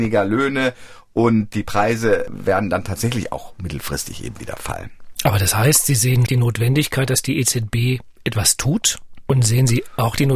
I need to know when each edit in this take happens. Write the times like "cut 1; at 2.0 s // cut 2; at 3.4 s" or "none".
cut 1; at 6.3 s // cut 2; at 9.3 s